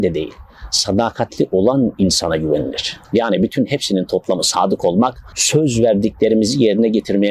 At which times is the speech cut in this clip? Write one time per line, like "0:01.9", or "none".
0:03.0
0:05.3

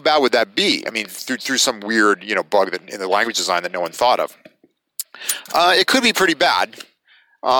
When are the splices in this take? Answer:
none

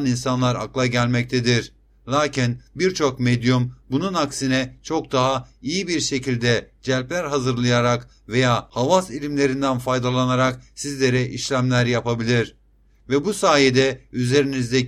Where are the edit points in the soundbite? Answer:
none

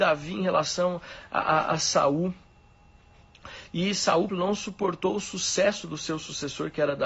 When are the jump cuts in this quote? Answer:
0:04.3

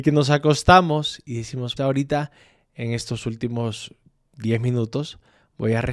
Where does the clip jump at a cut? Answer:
0:01.8

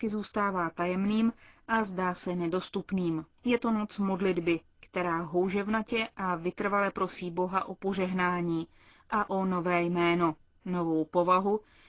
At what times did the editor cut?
0:03.4

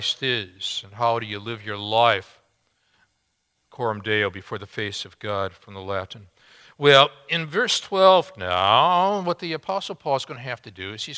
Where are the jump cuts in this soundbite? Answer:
none

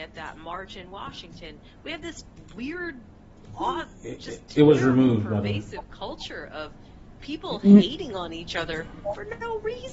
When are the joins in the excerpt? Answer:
none

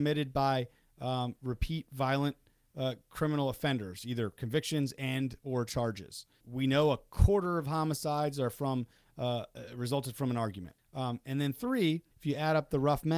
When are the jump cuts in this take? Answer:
0:06.4
0:10.8
0:12.1

